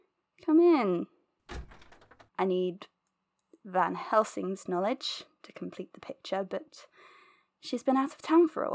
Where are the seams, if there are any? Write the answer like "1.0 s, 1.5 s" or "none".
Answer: 2.3 s